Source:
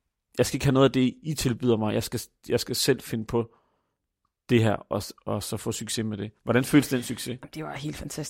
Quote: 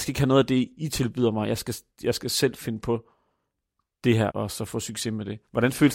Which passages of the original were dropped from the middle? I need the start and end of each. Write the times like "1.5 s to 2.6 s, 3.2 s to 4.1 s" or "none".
4.8 s to 5.2 s